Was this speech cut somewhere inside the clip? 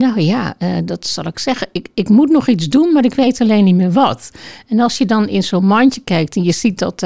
no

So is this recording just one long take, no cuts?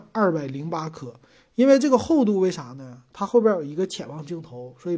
yes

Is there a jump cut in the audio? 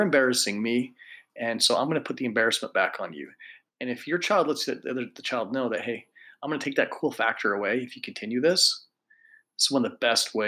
yes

